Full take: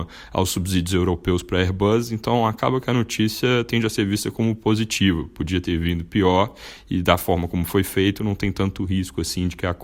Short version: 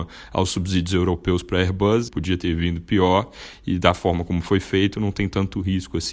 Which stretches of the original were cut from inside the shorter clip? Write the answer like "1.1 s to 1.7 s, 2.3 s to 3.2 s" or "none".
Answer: 2.1 s to 5.3 s